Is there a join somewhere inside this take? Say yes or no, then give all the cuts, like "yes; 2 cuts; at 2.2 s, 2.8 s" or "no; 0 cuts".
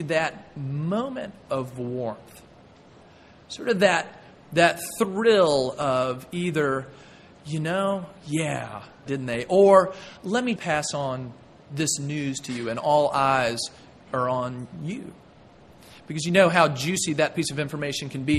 yes; 2 cuts; at 9.1 s, 10.6 s